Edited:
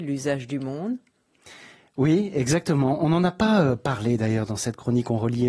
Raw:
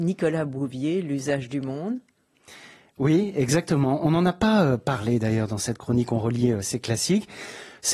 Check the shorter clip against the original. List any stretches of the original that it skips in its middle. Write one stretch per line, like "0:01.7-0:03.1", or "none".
none